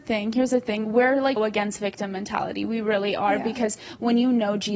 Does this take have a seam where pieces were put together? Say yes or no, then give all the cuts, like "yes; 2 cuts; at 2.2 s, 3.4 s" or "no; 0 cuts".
yes; 1 cut; at 1.4 s